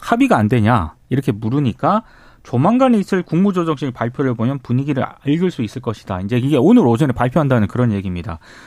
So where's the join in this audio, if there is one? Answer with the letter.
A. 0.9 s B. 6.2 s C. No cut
C